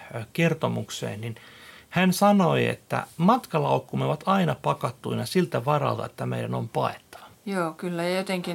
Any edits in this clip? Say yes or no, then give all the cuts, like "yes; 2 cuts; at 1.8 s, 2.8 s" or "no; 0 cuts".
yes; 1 cut; at 7.3 s